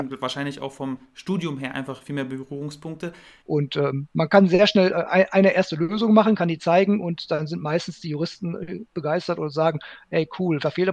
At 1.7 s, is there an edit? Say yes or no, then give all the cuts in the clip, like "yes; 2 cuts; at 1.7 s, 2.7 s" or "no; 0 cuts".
no; 1 cut; at 3.4 s